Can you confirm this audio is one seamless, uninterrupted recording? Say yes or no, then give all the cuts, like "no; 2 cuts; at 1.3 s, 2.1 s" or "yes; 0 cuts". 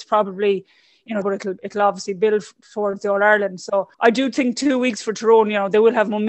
no; 2 cuts; at 1.2 s, 3.9 s